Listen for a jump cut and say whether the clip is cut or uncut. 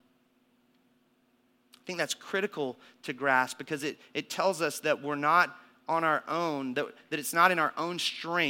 uncut